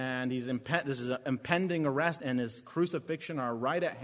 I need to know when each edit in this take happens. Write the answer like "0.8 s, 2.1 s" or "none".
2.2 s